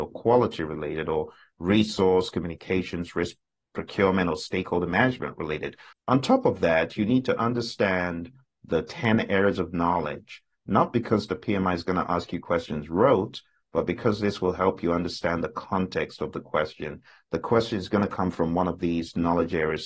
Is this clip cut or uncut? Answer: cut